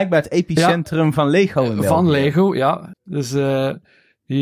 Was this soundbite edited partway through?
yes; 1 cut; at 2.9 s

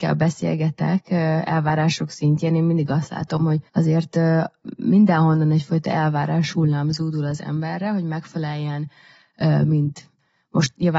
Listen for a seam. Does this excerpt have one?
yes; 1 cut; at 3.7 s

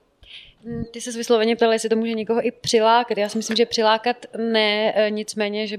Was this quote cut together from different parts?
no; 0 cuts

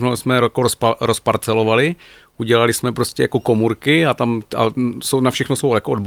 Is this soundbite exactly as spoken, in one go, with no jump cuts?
yes; 0 cuts

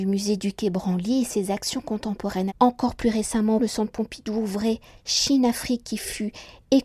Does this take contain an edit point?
yes; 2 cuts; at 2.5 s, 3.6 s

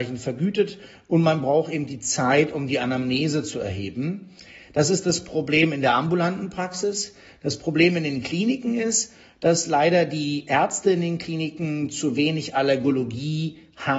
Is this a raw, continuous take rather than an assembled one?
yes; 0 cuts

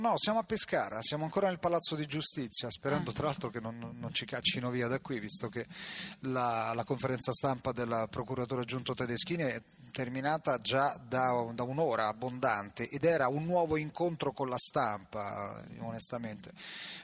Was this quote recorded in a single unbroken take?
yes; 0 cuts

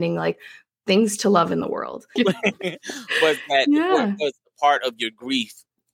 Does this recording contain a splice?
yes; 1 cut; at 2.2 s

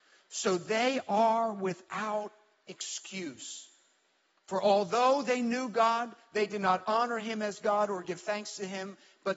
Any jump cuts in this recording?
no; 0 cuts

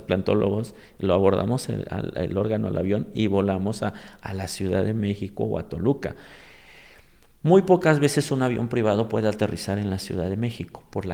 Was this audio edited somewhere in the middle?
no; 0 cuts

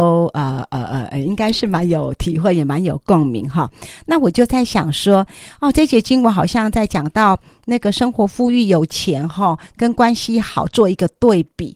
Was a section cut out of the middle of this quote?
no; 0 cuts

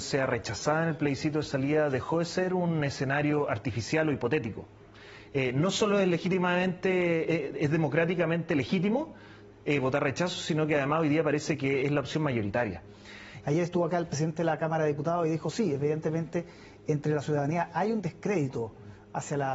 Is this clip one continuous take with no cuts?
no; 1 cut; at 13.4 s

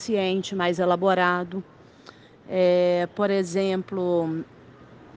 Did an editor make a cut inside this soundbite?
no; 0 cuts

